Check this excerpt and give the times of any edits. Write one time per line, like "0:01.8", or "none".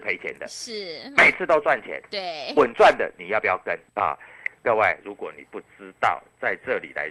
0:02.5
0:03.9
0:05.0

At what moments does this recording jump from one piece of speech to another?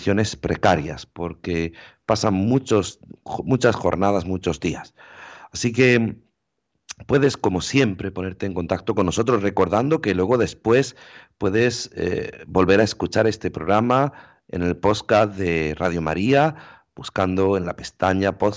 none

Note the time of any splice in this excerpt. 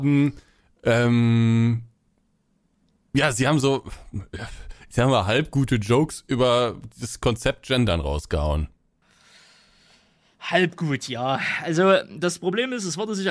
none

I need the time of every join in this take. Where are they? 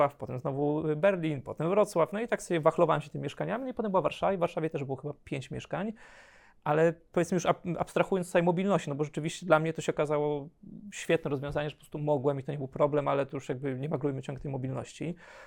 none

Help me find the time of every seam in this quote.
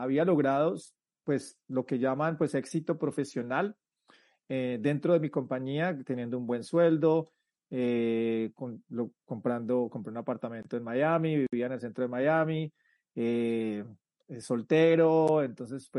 none

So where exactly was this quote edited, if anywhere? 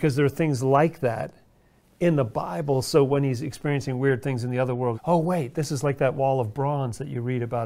0:04.9

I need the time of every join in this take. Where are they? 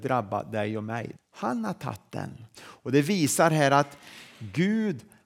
0:01.2
0:02.5

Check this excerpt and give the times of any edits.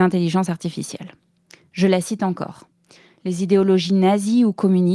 0:03.2

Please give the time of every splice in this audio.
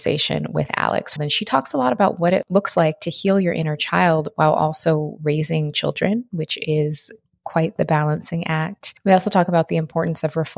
0:01.2

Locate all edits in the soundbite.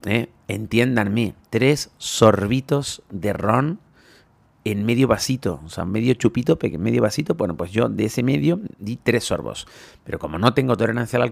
none

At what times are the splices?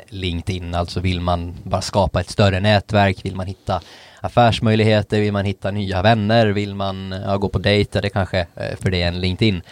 0:08.8

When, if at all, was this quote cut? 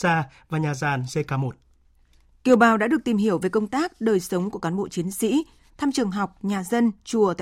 0:05.7

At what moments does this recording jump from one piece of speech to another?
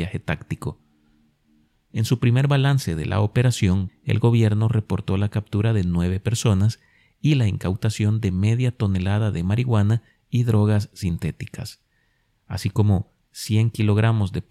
0:03.9

